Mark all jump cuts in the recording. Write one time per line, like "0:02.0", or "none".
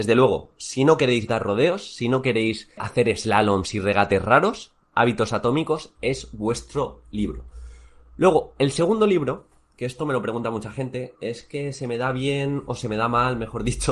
0:02.8